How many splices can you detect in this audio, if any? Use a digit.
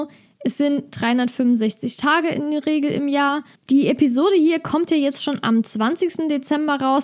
1